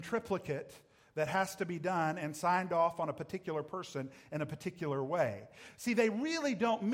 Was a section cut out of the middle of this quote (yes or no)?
no